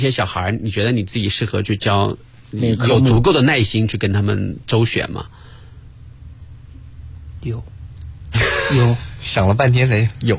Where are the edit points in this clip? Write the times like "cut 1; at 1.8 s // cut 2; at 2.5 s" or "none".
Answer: none

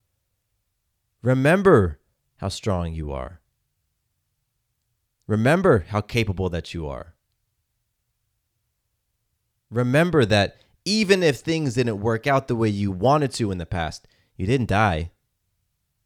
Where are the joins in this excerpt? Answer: none

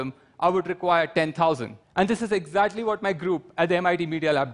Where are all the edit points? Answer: cut 1; at 1.8 s

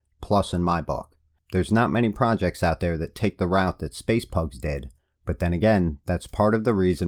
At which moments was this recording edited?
none

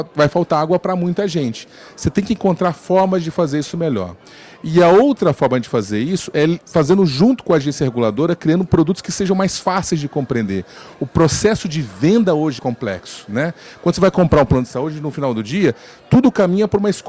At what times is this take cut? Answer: cut 1; at 12.6 s

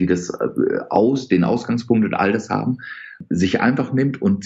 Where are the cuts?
none

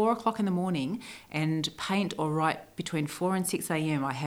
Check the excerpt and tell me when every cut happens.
none

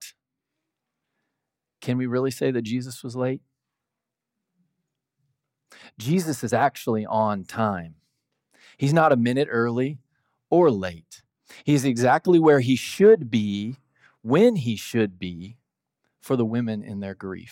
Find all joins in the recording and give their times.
none

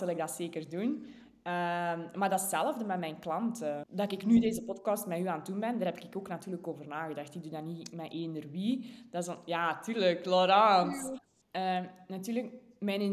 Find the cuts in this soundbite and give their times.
cut 1; at 3.8 s // cut 2; at 11.4 s

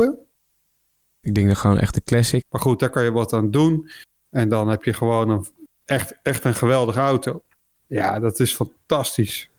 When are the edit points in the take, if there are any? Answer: cut 1; at 1.2 s // cut 2; at 2.4 s // cut 3; at 7.8 s

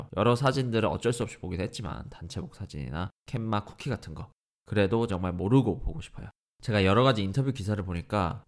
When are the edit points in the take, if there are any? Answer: cut 1; at 5.1 s // cut 2; at 6.5 s

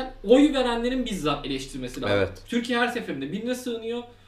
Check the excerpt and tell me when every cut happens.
cut 1; at 2.4 s

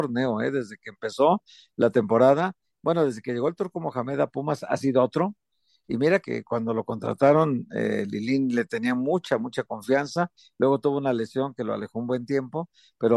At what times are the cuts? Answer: cut 1; at 6.2 s

